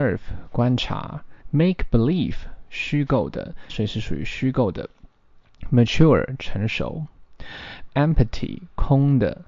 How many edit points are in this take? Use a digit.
3